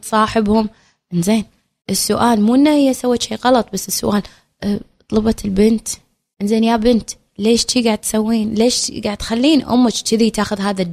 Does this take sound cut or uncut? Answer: uncut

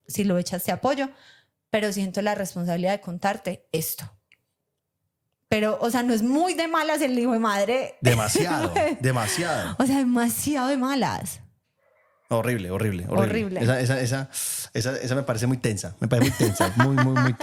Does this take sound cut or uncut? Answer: uncut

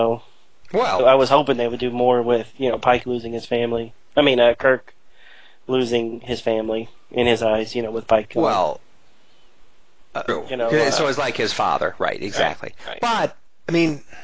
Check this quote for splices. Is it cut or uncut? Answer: cut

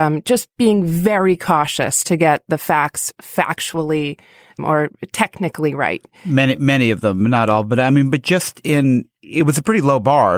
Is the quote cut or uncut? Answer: uncut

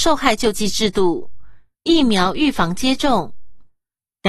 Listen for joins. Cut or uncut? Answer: cut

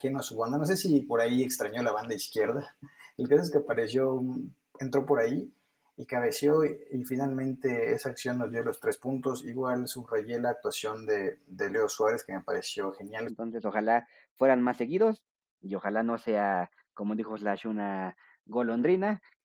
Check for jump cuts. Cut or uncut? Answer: cut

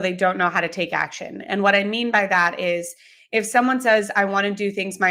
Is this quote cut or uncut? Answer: uncut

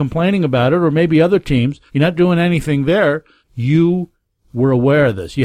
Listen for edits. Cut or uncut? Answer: cut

